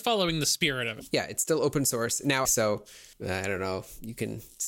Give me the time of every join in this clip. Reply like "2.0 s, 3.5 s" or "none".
2.4 s